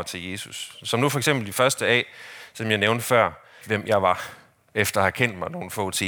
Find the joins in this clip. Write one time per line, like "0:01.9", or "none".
0:03.6